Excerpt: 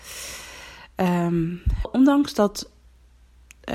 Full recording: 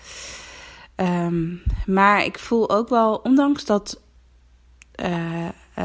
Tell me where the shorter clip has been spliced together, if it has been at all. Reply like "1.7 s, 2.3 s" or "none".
1.8 s